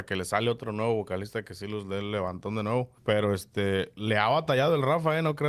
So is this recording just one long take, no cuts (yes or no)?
no